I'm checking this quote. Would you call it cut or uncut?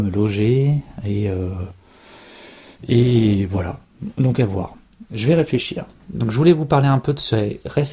uncut